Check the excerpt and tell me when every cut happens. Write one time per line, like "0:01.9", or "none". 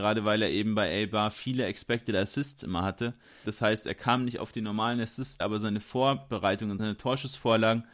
0:03.4
0:05.4
0:06.8